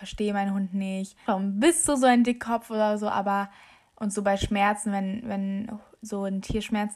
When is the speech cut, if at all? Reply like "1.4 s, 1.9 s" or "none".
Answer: 1.3 s